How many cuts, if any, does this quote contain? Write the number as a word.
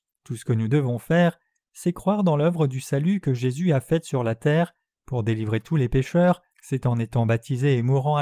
one